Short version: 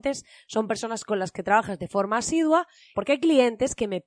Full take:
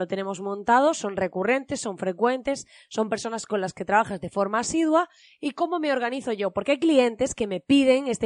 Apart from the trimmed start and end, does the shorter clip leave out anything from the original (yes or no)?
yes